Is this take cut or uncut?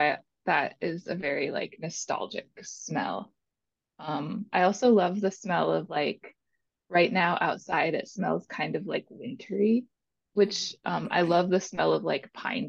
uncut